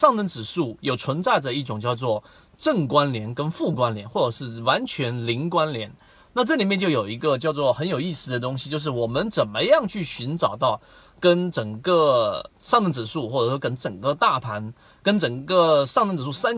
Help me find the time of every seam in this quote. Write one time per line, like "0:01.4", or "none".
none